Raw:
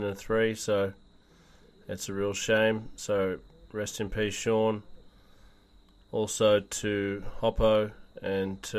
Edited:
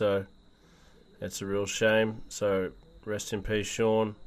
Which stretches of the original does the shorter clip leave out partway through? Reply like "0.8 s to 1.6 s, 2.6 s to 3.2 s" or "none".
none